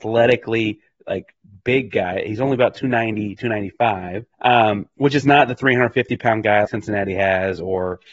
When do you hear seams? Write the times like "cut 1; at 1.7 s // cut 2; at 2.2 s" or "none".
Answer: cut 1; at 4.3 s // cut 2; at 6.6 s